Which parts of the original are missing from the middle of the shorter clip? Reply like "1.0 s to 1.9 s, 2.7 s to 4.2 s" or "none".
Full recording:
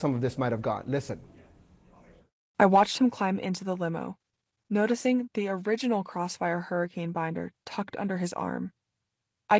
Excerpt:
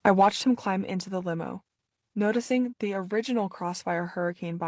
none